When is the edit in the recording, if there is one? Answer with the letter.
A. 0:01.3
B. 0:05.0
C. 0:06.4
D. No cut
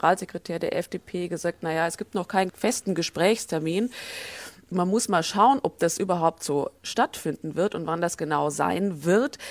D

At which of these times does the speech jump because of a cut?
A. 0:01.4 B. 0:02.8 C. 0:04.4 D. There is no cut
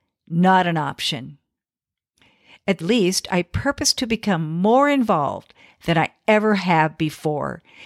B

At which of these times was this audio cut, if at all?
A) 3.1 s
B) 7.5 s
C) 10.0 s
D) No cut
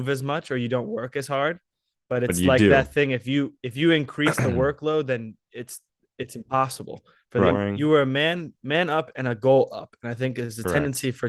B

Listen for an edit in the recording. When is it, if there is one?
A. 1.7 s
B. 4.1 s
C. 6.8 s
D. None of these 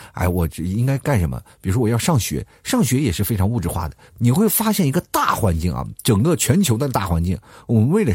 B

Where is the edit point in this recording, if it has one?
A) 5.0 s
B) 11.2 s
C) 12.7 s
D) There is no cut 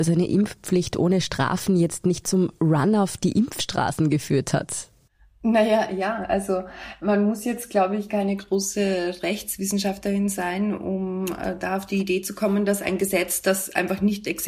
D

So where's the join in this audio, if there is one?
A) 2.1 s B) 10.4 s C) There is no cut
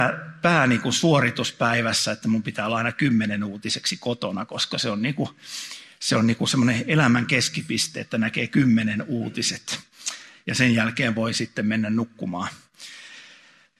C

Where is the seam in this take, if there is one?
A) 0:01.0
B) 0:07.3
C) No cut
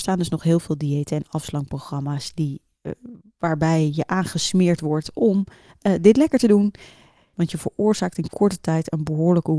B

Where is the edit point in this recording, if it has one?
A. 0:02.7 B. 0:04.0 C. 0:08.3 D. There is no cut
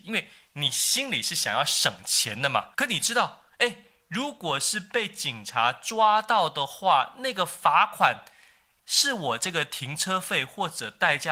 A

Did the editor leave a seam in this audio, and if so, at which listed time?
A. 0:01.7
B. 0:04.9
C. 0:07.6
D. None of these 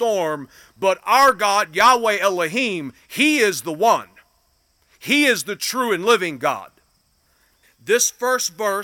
C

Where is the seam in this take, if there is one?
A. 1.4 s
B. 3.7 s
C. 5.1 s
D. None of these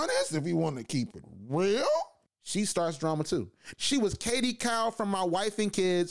B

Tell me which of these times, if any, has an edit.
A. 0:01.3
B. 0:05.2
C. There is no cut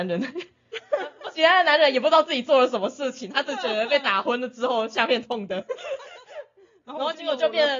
B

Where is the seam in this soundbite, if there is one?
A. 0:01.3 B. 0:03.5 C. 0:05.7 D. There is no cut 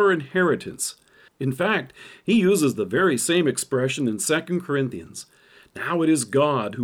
A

